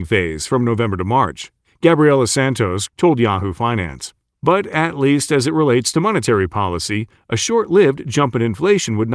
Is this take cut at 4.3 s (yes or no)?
yes